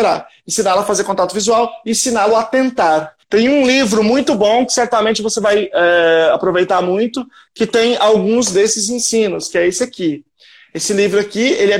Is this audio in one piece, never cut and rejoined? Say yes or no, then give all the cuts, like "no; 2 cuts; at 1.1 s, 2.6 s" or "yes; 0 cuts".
no; 1 cut; at 3.2 s